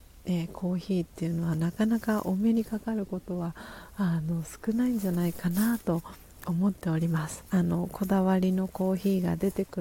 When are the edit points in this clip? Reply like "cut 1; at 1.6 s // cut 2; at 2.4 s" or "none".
cut 1; at 7.5 s